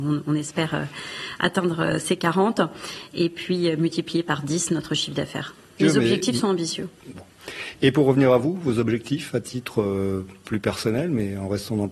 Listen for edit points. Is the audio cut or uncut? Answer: cut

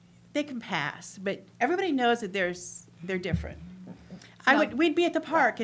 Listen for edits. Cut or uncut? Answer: uncut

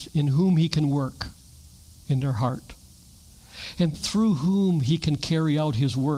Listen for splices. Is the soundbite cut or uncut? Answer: cut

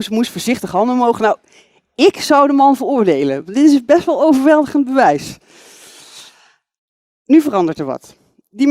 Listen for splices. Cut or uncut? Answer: uncut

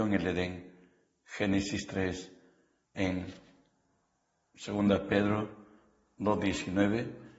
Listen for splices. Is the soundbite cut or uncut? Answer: cut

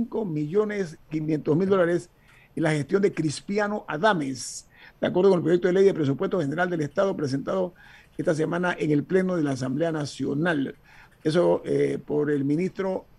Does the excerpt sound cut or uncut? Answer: uncut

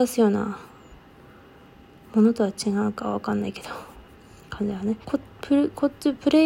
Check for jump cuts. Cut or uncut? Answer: cut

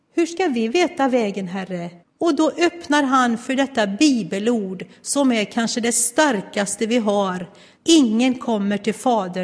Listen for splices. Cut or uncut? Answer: cut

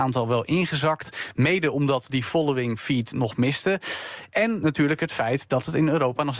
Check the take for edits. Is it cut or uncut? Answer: uncut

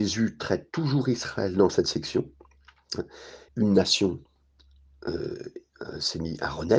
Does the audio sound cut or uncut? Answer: cut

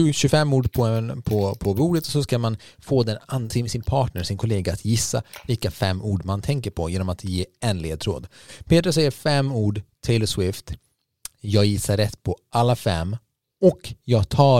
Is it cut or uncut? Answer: uncut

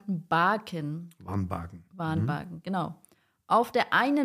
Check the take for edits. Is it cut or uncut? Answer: uncut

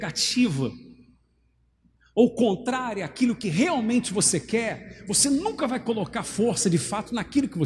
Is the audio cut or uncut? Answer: uncut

